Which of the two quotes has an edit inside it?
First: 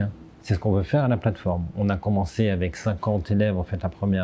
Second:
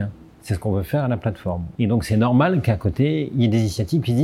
second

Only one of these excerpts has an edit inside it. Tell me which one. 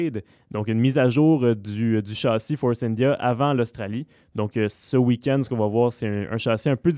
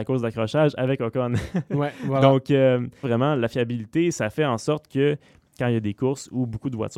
second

